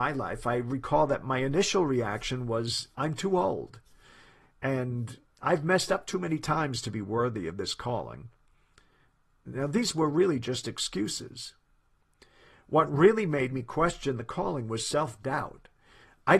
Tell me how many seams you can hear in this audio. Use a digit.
0